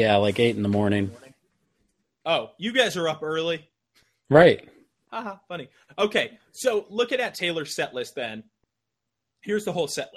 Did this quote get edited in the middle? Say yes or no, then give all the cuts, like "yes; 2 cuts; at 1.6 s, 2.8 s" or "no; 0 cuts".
yes; 1 cut; at 5.0 s